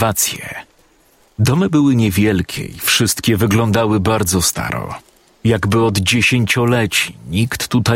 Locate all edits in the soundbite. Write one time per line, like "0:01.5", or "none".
0:01.3